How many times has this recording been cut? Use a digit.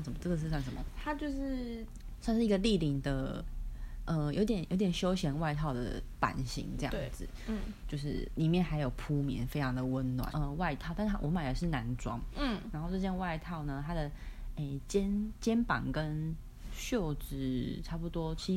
2